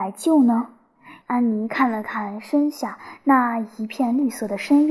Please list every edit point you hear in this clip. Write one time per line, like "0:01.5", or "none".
0:01.2